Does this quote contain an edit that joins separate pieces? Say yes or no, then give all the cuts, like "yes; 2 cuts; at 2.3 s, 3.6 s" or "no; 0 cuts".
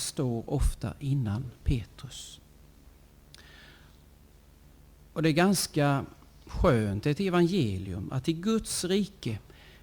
no; 0 cuts